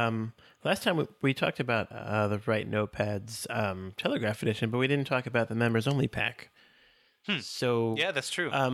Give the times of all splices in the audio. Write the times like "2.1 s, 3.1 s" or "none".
none